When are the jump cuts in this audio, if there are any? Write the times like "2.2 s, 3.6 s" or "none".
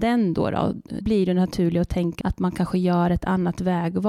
1.0 s, 2.2 s

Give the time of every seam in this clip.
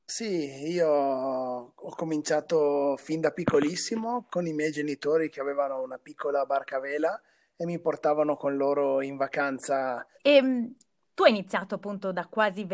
10.1 s

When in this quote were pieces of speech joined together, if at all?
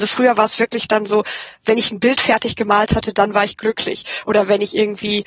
none

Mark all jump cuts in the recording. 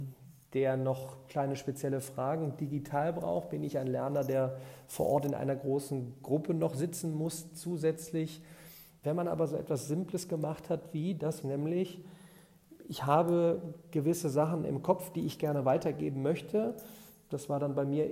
9.0 s, 11.4 s

